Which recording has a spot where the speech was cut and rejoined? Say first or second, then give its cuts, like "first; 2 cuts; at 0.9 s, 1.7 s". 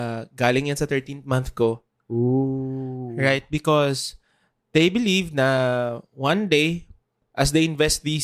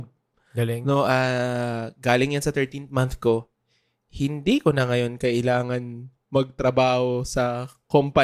first; 1 cut; at 2.0 s